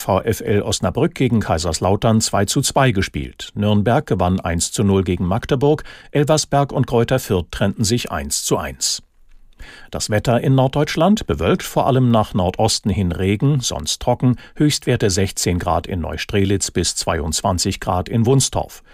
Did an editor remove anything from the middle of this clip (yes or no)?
no